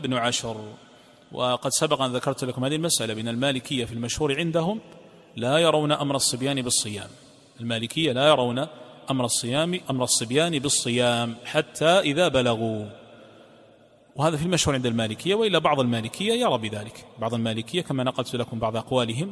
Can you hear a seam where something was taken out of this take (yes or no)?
yes